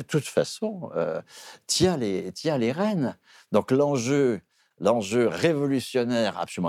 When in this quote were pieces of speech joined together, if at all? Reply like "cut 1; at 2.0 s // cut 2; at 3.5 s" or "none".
none